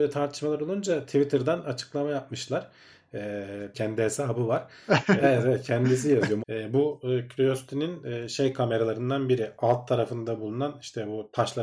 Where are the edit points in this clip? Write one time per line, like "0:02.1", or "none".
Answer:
0:03.7
0:05.2
0:06.4